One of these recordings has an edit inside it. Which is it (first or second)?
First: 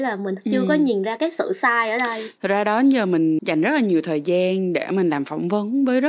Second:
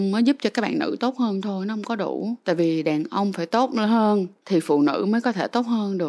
first